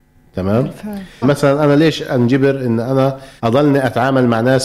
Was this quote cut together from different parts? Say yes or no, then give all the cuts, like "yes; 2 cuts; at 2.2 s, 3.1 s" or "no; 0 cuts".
yes; 2 cuts; at 1.2 s, 3.4 s